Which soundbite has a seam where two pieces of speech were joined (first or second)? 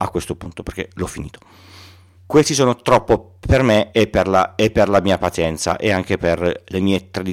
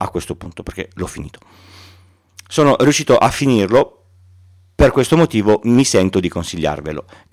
first